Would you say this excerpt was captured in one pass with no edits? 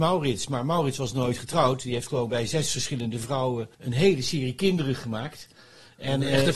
no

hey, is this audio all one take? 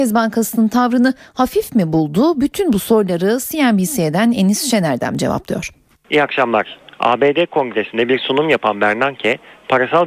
no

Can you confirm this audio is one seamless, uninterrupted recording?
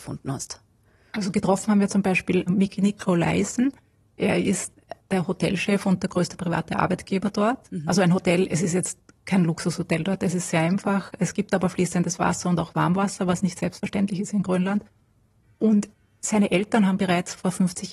no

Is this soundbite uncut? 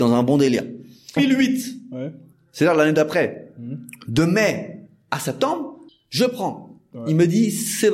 no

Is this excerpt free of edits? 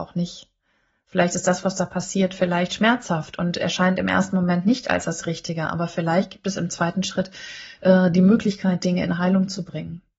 yes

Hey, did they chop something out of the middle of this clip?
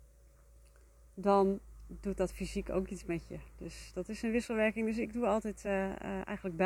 no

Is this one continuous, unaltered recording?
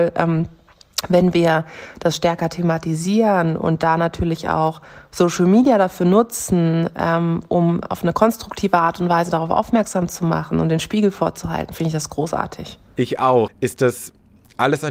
no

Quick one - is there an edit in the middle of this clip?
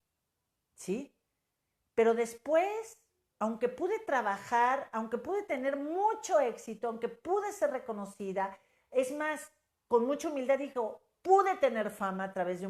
no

